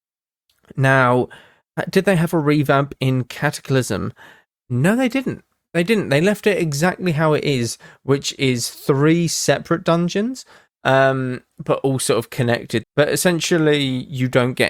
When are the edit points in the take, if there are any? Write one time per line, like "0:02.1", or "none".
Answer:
0:12.8